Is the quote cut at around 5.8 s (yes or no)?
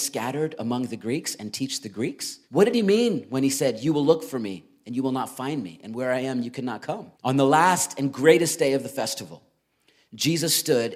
no